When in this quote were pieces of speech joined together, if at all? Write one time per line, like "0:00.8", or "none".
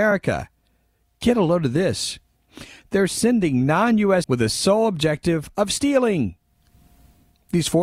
0:04.2